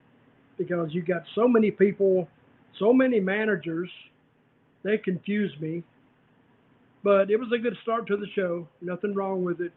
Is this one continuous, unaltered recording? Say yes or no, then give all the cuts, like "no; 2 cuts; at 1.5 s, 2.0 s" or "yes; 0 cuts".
yes; 0 cuts